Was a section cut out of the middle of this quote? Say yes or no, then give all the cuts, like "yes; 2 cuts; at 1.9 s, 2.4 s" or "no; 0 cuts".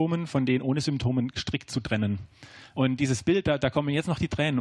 yes; 1 cut; at 2.7 s